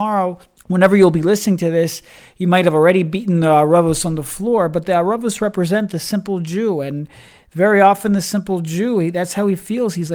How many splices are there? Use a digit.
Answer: 0